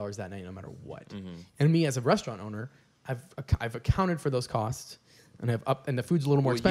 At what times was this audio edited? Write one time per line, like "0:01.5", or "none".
none